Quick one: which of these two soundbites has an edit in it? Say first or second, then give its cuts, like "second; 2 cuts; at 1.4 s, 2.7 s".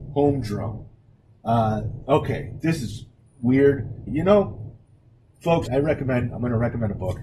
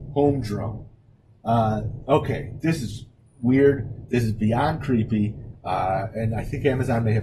first; 2 cuts; at 4.1 s, 5.7 s